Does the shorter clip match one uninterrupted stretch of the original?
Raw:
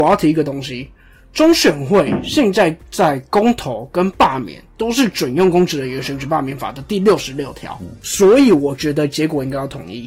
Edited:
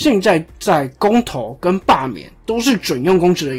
yes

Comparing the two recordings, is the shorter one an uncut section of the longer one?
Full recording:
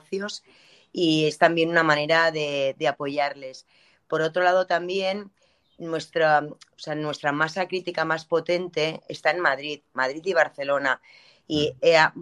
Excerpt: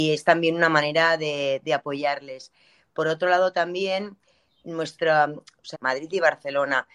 no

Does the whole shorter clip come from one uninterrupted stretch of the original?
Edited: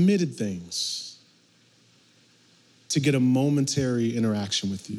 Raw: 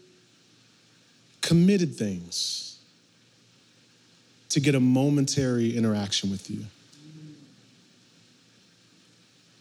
yes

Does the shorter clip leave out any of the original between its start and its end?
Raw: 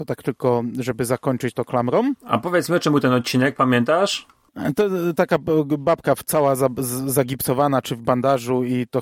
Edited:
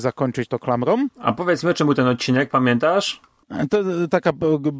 no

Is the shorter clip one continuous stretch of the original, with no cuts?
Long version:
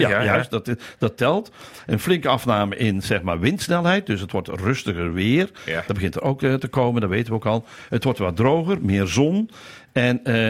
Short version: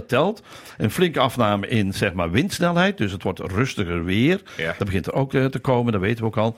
yes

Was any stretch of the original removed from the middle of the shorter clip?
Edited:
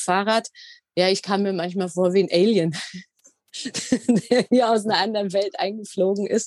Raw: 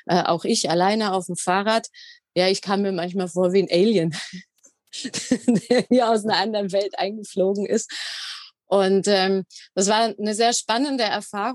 no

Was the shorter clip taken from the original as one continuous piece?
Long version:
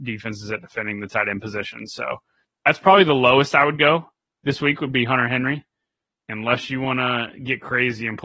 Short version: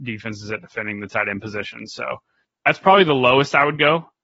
yes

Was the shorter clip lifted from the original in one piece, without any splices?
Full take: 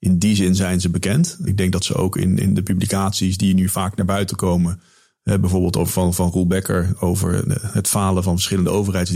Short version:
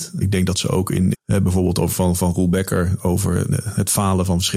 no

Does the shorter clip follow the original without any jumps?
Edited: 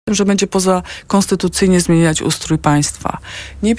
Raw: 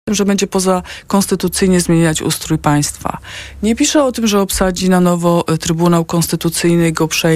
yes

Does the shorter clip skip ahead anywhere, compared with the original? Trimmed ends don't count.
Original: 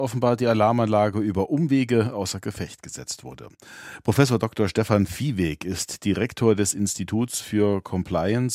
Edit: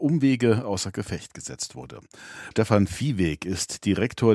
yes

